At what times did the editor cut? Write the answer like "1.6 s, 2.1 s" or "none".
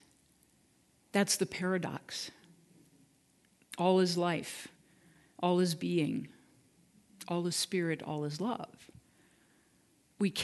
none